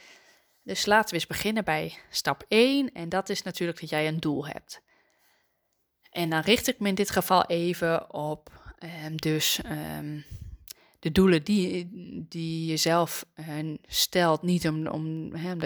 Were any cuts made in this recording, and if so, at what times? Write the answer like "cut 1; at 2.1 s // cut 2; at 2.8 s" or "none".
none